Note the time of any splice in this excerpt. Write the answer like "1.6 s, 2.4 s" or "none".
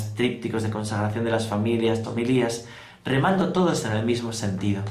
2.0 s